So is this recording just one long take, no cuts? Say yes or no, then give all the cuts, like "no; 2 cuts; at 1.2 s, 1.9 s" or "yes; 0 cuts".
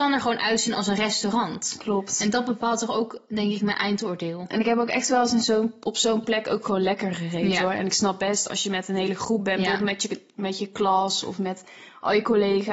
yes; 0 cuts